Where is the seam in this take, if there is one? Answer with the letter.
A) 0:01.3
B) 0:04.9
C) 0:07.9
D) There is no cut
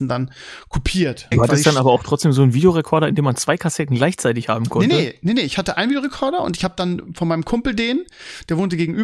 A